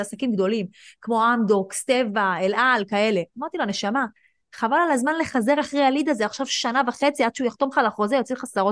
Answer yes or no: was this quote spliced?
no